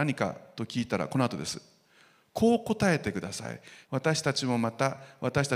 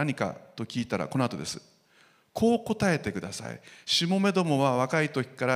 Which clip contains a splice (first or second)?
first